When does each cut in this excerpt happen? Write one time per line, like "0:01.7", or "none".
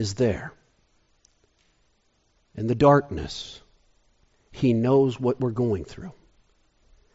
none